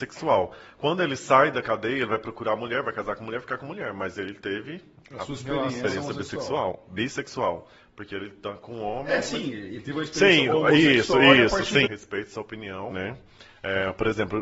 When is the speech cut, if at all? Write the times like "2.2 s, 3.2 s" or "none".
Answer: 11.9 s, 12.9 s